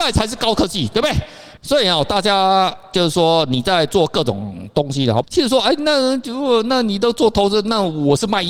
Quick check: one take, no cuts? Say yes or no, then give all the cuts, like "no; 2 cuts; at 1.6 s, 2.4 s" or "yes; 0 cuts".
no; 2 cuts; at 1.6 s, 5.2 s